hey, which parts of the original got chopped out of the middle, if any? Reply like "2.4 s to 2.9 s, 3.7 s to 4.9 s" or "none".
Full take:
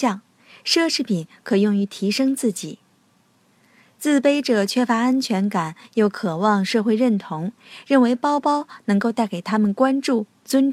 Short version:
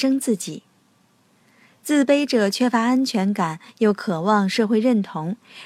none